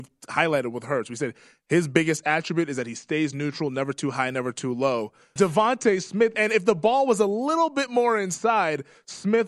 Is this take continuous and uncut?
no; 1 cut; at 5.4 s

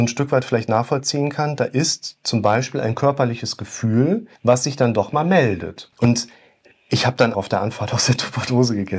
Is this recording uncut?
no; 3 cuts; at 4.4 s, 5.9 s, 7.3 s

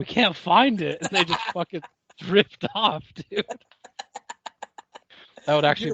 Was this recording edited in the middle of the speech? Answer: no; 0 cuts

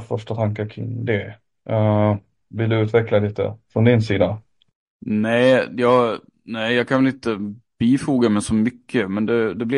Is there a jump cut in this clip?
no; 0 cuts

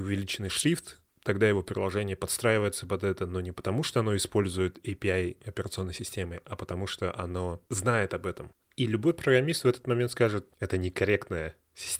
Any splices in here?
yes; 2 cuts; at 8.6 s, 10.5 s

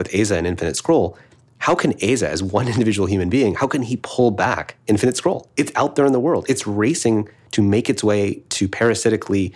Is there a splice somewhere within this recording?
no; 0 cuts

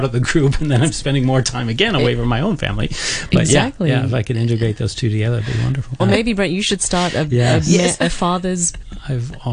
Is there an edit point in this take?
yes; 1 cut; at 6.0 s

